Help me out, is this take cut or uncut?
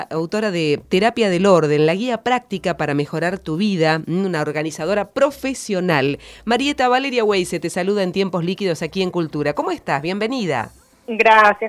uncut